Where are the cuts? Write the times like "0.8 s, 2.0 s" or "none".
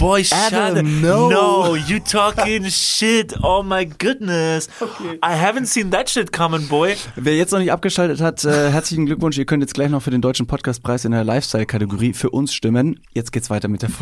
13.0 s